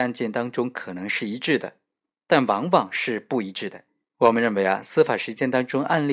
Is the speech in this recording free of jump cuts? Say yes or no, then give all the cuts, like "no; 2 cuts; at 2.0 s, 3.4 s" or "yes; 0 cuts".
no; 1 cut; at 4.1 s